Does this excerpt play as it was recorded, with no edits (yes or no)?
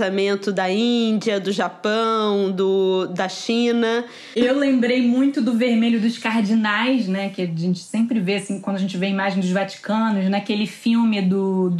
yes